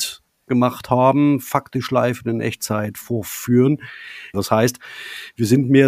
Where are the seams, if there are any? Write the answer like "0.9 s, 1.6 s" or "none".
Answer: 4.3 s